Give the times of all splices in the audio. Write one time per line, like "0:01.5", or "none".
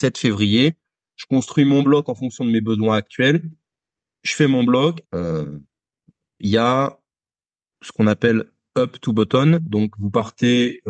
0:05.0